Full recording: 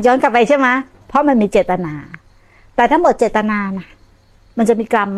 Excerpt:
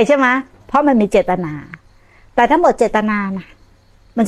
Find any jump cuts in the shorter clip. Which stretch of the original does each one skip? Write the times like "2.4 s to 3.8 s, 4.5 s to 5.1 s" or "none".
none